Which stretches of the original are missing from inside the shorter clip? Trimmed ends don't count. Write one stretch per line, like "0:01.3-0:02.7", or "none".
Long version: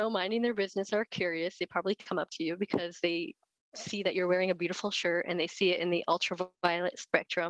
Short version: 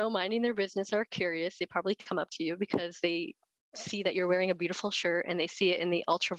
none